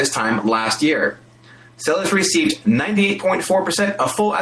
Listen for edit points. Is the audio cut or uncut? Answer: uncut